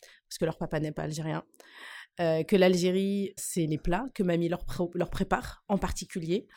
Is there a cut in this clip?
yes; 1 cut; at 3.4 s

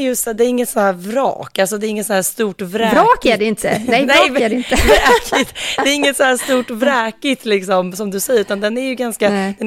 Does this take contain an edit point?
no; 0 cuts

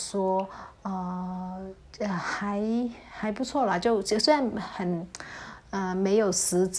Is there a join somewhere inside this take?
no; 0 cuts

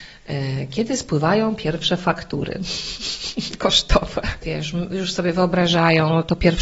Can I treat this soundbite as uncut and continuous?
no; 1 cut; at 4.4 s

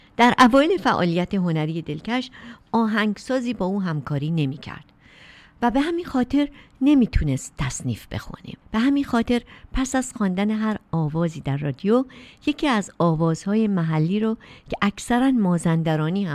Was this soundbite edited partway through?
yes; 1 cut; at 8.6 s

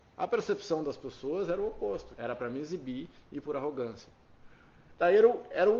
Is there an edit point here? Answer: yes; 1 cut; at 2.2 s

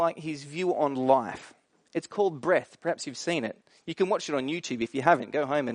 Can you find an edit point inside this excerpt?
no; 0 cuts

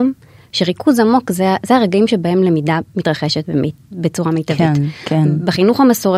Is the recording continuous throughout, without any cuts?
yes; 0 cuts

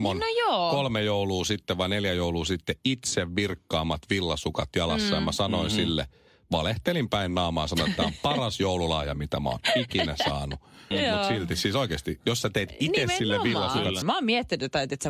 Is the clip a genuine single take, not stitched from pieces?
no; 2 cuts; at 10.9 s, 14.0 s

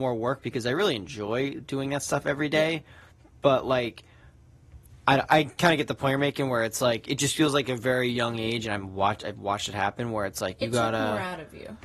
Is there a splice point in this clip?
yes; 1 cut; at 5.3 s

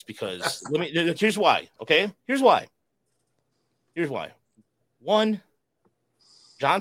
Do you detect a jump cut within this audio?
no; 0 cuts

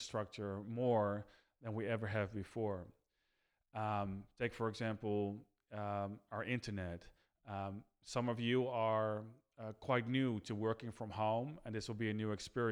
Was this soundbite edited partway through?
no; 0 cuts

